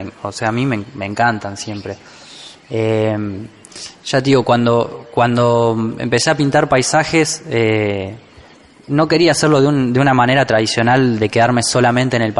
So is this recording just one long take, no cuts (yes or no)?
yes